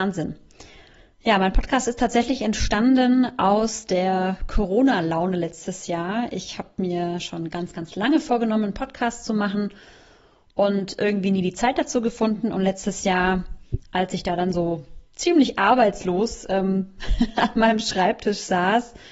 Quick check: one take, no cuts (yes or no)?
yes